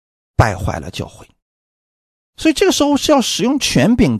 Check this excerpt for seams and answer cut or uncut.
uncut